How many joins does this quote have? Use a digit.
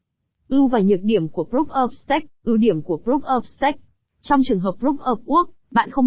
2